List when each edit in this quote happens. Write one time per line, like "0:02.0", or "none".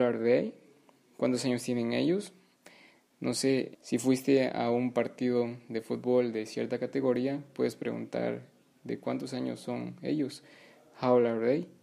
0:03.7